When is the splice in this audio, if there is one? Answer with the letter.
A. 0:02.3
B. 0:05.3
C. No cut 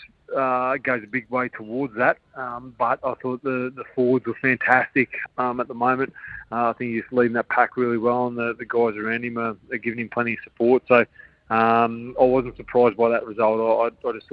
B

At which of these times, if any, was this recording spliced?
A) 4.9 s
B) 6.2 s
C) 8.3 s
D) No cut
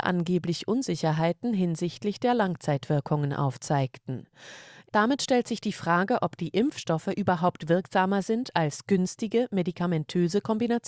A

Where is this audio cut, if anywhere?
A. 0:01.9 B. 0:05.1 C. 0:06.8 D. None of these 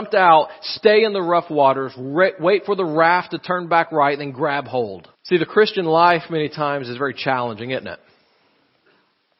B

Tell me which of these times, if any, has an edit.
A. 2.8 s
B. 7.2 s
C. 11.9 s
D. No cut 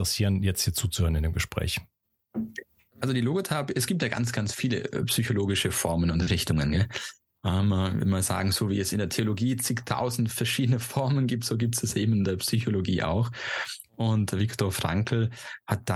D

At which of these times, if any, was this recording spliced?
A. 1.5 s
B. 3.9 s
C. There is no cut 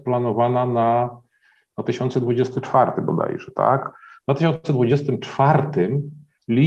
B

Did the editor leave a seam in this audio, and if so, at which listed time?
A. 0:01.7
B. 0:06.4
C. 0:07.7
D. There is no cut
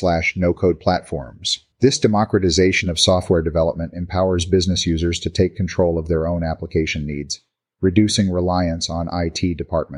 A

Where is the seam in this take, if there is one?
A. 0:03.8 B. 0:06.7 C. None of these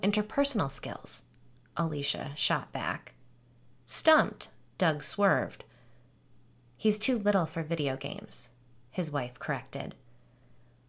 B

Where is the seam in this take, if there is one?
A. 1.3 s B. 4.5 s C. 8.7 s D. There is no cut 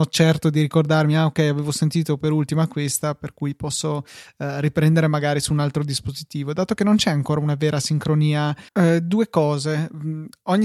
C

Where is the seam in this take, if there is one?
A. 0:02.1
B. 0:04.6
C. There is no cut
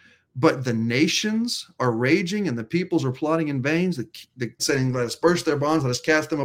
B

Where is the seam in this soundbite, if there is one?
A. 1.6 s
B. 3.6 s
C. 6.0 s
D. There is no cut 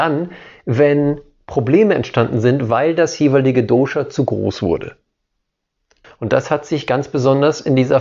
C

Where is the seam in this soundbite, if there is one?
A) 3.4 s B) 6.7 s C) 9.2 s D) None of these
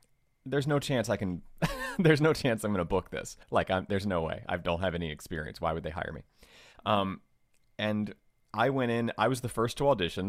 A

